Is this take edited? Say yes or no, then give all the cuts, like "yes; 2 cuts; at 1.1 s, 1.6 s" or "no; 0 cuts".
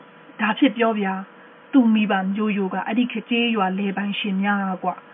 yes; 1 cut; at 3.2 s